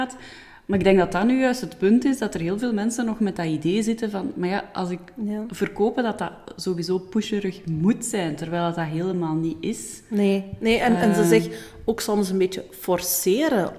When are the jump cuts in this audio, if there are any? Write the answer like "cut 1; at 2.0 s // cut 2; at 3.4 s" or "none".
none